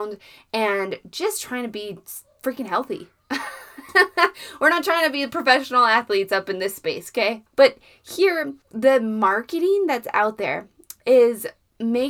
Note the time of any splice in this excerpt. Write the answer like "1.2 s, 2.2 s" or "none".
7.5 s, 8.6 s